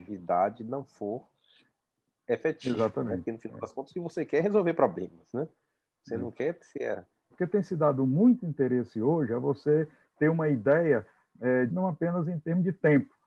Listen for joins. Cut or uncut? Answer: cut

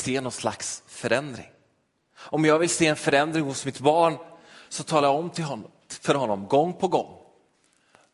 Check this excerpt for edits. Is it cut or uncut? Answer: uncut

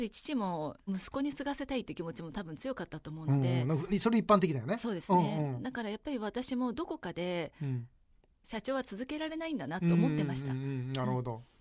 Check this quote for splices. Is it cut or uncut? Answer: uncut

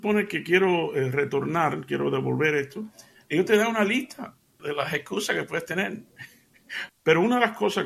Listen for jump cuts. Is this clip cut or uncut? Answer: cut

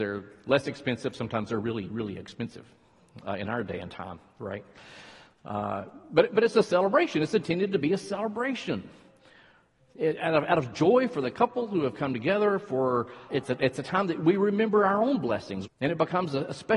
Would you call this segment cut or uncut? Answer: cut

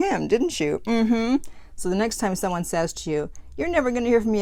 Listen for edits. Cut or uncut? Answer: uncut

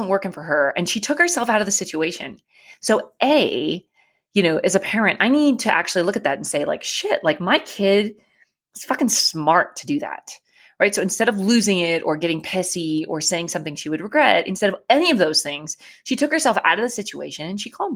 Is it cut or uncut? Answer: uncut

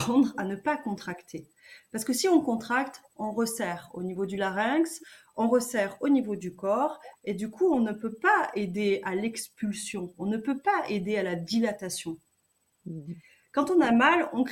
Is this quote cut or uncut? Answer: uncut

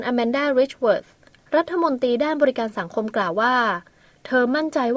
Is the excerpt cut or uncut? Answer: uncut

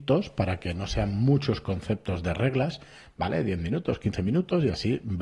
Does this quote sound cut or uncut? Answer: uncut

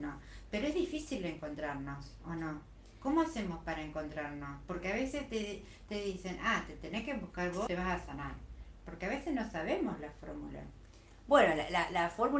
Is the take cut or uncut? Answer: cut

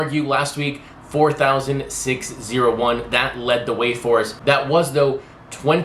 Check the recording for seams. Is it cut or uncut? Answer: uncut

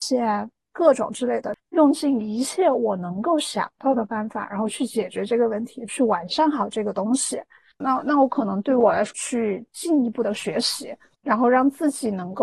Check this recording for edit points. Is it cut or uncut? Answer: cut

